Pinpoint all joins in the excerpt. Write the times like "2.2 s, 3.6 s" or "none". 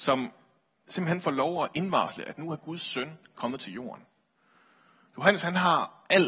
none